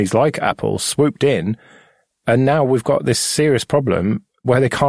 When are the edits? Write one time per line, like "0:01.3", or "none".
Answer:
none

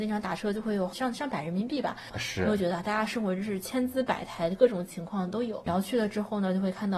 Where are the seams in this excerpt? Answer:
0:02.1
0:05.7

